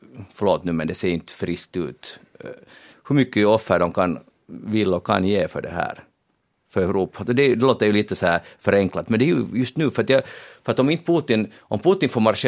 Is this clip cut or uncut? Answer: cut